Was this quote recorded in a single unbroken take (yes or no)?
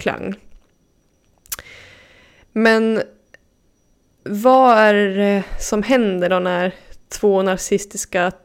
no